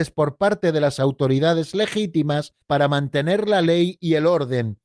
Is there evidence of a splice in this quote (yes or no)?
yes